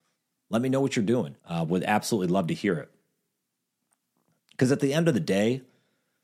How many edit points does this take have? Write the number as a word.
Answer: one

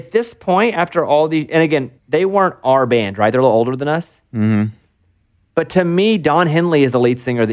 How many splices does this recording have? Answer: one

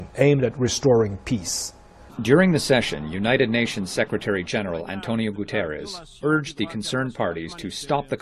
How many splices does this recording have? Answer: one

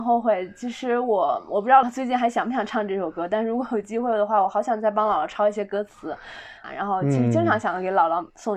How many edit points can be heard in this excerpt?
two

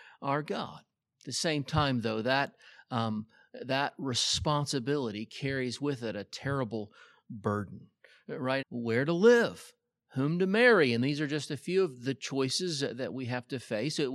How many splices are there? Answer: one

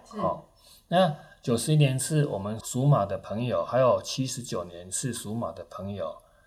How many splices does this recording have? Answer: one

